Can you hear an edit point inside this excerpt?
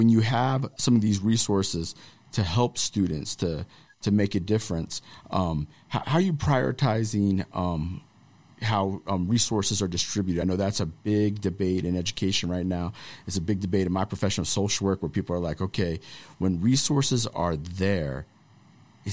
no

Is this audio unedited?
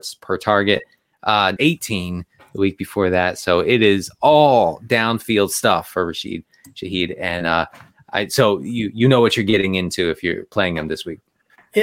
no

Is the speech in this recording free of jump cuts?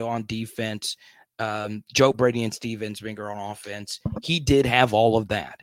yes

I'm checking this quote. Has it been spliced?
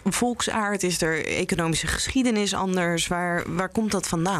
no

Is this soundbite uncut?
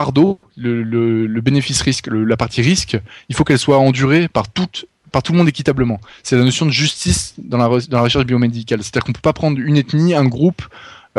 yes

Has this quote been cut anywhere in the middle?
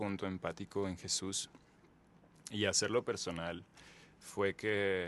no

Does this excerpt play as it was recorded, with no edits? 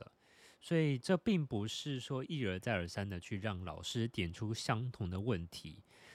no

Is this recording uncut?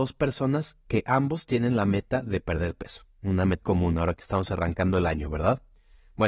no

